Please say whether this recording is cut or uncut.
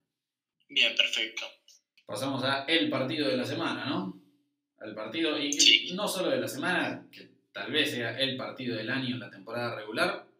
uncut